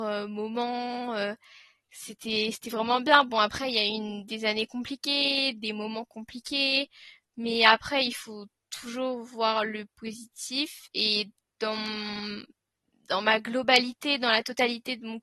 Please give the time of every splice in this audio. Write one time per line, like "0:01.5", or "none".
none